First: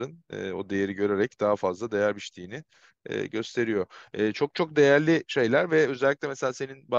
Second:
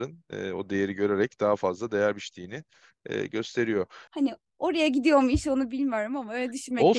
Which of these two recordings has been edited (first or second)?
second